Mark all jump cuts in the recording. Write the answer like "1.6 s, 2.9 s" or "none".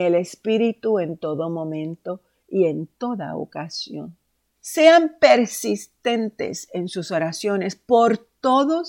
4.6 s